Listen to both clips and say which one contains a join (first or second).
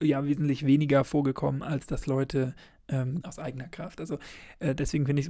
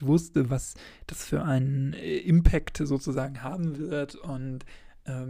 first